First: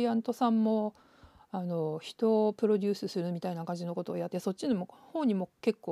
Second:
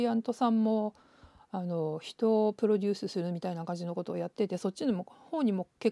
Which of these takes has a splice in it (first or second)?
first